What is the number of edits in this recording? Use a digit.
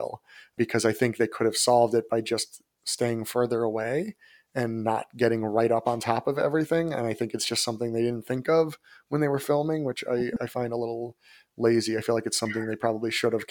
0